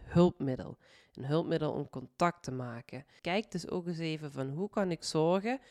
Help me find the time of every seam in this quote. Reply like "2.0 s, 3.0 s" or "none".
3.2 s